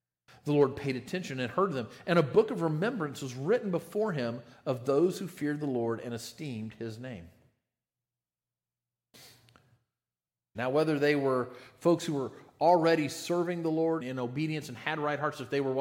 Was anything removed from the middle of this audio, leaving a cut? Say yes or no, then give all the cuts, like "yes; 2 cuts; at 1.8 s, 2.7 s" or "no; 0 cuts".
yes; 2 cuts; at 10.5 s, 14.0 s